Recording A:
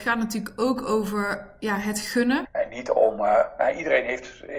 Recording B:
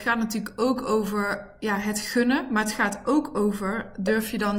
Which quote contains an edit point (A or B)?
A